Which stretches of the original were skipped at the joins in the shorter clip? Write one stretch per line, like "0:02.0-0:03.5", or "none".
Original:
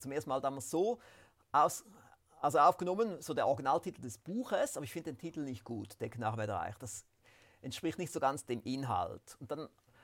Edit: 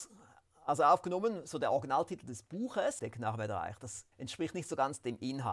0:04.7-0:06.0
0:07.1-0:07.6